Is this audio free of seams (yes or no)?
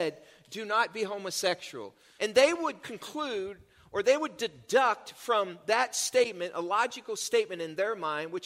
no